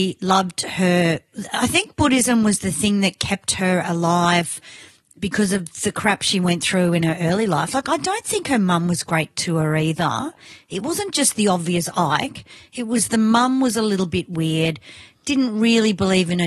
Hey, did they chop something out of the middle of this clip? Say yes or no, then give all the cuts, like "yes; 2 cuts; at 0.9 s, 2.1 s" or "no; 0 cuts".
no; 0 cuts